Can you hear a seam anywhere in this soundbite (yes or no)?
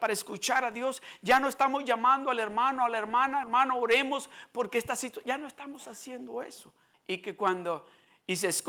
yes